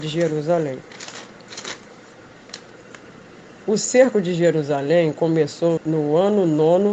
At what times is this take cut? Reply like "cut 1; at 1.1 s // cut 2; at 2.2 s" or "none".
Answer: cut 1; at 5.8 s